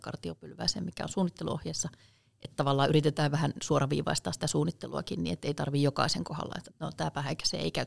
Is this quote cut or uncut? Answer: cut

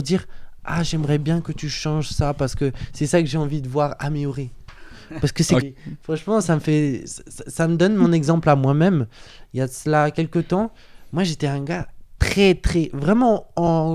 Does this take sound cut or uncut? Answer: cut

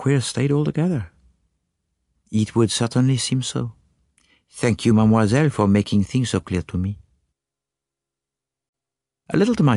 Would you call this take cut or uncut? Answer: uncut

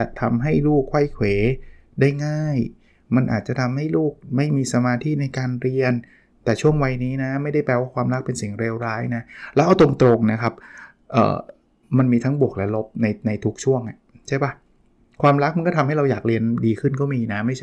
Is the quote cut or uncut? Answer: uncut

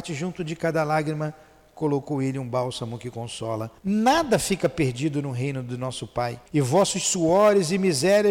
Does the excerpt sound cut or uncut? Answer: cut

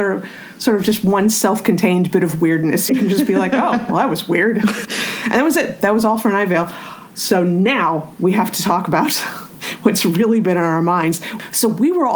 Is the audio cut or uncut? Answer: cut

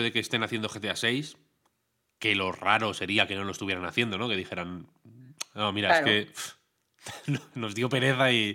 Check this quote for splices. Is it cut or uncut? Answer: uncut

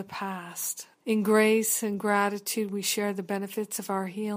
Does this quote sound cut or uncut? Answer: cut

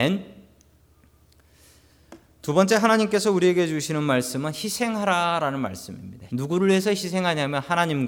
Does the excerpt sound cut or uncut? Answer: cut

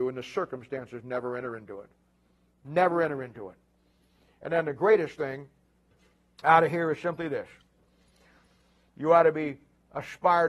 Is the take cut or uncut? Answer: uncut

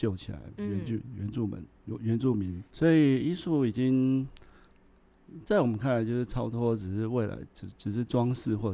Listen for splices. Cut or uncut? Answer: cut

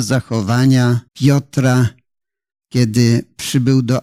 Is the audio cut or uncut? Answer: cut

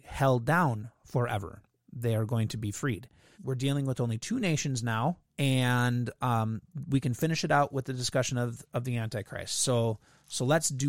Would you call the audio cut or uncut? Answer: cut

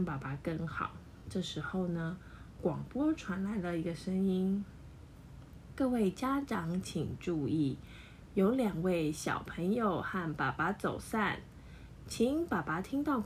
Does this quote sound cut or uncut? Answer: uncut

